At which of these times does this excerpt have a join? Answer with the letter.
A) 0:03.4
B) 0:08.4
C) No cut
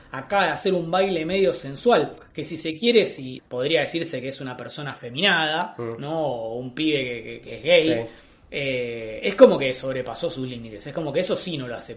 A